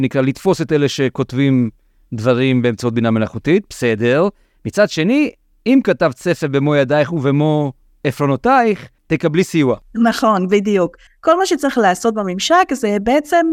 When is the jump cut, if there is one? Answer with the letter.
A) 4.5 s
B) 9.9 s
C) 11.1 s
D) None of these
C